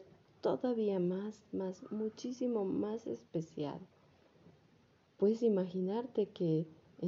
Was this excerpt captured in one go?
no; 1 cut; at 1.5 s

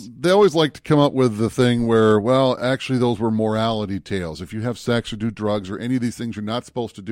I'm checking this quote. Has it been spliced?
no; 0 cuts

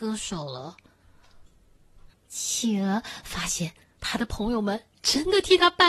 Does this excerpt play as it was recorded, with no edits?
no; 1 cut; at 2.1 s

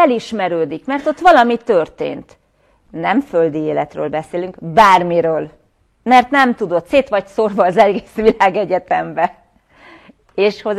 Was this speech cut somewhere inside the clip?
no; 0 cuts

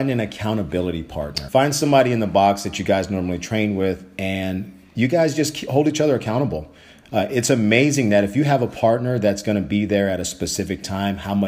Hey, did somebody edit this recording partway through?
yes; 1 cut; at 1.5 s

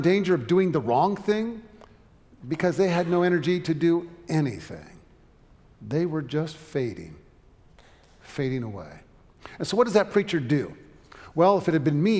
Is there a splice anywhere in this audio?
no; 0 cuts

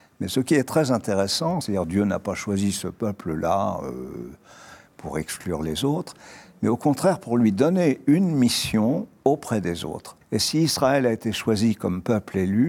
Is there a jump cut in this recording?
yes; 2 cuts; at 1.6 s, 10.2 s

